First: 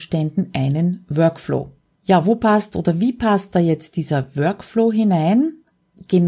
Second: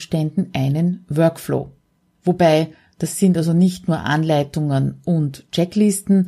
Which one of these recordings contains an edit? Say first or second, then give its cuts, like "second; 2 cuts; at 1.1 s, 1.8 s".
first; 1 cut; at 2.0 s